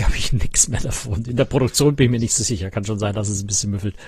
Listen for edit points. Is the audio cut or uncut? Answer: uncut